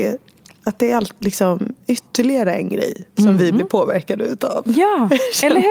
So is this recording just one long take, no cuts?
yes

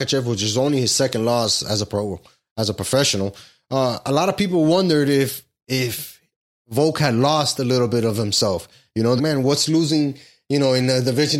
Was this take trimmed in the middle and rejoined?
yes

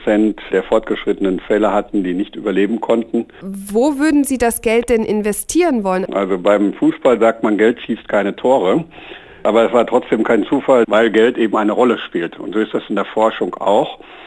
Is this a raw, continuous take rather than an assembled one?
no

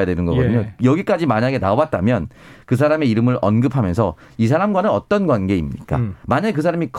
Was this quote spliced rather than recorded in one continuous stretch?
no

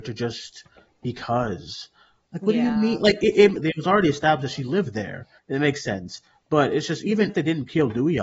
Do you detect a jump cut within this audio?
yes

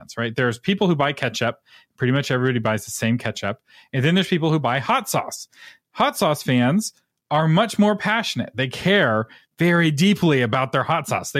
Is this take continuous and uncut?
yes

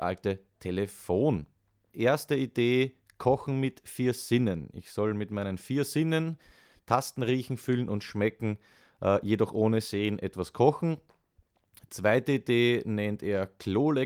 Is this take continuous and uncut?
no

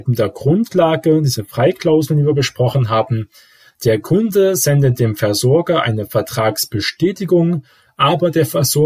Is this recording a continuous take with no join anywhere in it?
yes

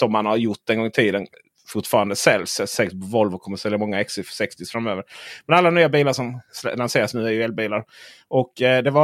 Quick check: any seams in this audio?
no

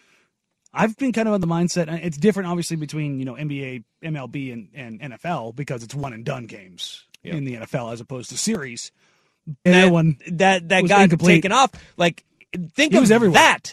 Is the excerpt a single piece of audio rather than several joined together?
no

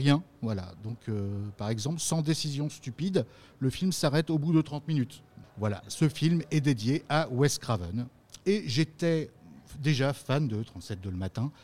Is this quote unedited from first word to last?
no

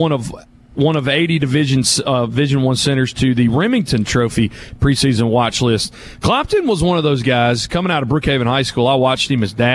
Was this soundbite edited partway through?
yes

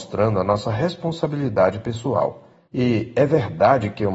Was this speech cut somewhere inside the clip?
yes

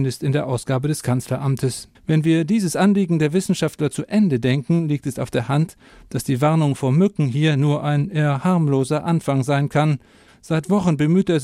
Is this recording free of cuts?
no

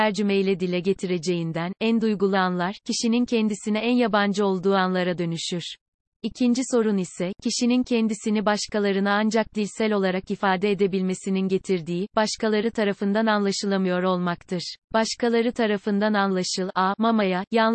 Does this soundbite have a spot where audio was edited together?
yes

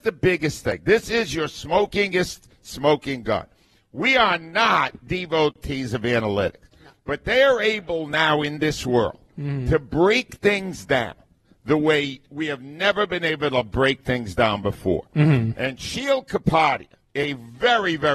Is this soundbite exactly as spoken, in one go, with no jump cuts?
yes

